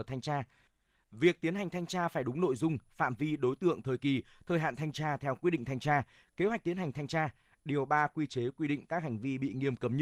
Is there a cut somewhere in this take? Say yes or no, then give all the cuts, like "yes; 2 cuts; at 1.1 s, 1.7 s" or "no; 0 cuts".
no; 0 cuts